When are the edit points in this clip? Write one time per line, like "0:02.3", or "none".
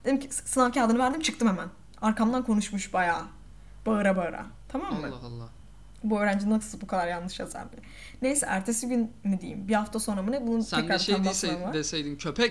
none